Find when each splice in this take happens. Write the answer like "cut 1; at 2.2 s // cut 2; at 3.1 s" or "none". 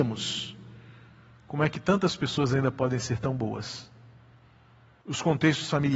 cut 1; at 5.0 s